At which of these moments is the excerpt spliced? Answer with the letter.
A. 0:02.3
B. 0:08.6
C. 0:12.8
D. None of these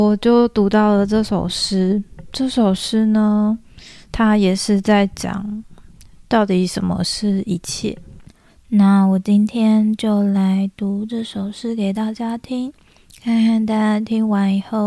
D